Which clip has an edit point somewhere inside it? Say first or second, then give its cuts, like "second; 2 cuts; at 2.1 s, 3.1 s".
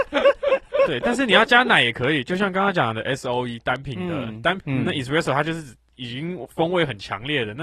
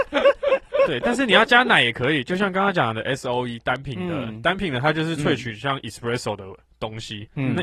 first; 1 cut; at 4.6 s